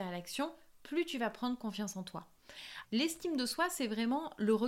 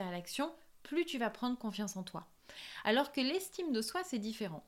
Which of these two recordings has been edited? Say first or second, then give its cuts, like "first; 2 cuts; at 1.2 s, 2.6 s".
first; 1 cut; at 2.8 s